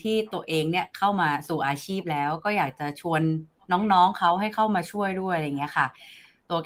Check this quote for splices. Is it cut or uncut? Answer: uncut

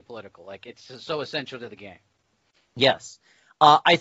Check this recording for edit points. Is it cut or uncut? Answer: uncut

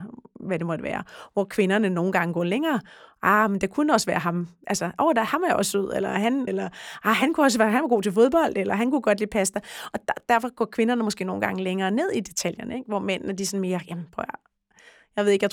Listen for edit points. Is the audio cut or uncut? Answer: cut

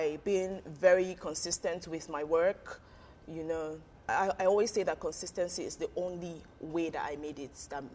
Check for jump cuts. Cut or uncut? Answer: cut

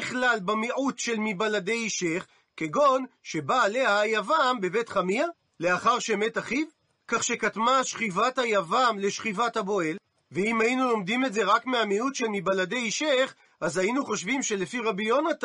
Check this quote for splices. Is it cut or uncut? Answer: uncut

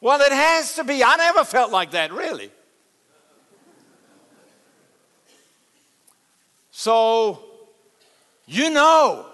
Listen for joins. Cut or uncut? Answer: uncut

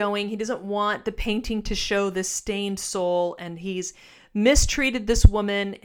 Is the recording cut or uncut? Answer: uncut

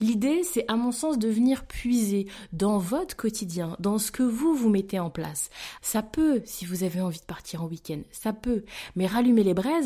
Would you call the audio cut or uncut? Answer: cut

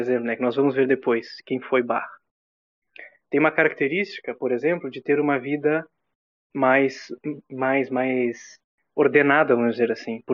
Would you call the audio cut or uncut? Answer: uncut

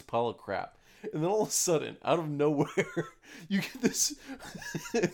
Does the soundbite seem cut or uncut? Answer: uncut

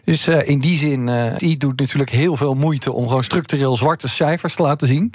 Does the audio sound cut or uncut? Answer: cut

